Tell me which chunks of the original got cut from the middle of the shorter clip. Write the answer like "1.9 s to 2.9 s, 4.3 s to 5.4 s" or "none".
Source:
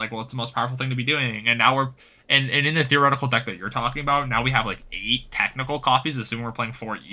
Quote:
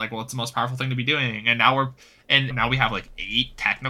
2.5 s to 4.2 s